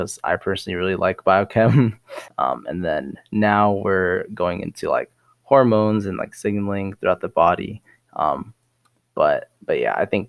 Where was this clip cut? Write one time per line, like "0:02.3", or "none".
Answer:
0:02.3